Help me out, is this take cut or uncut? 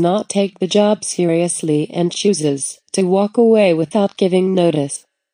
uncut